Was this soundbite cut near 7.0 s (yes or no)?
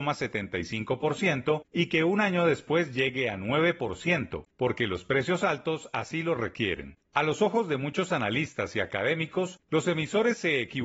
no